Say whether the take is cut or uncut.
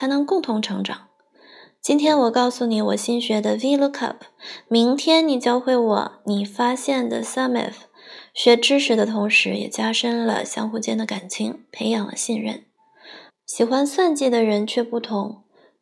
cut